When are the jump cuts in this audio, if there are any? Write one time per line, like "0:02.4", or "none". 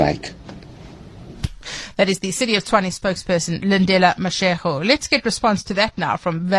none

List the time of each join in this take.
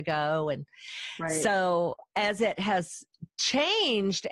none

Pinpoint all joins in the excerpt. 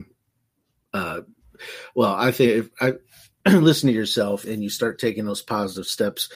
0:03.4
0:04.4

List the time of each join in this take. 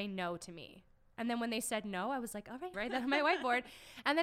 0:02.7

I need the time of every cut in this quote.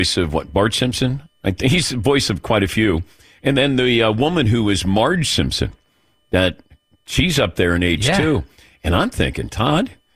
none

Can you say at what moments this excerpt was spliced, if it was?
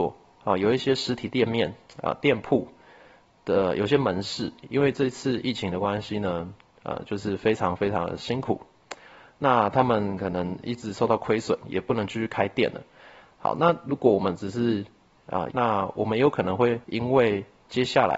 0:15.5
0:16.8

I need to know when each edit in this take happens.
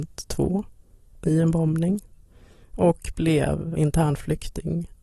0:03.7

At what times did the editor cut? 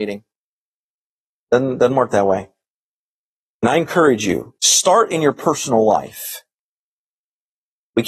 0:03.5
0:04.6

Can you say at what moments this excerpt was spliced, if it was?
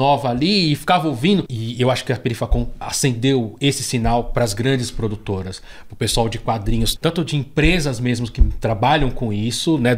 0:01.5
0:07.0

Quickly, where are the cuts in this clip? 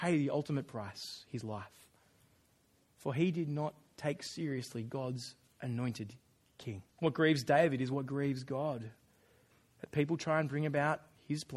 0:06.9

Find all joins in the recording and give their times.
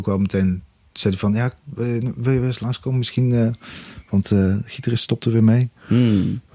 none

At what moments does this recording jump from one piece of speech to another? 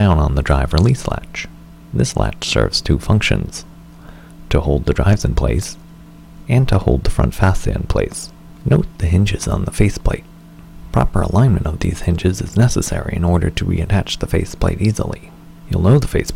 0:08.6

